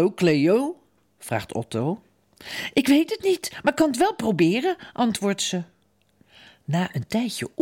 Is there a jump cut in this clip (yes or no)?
no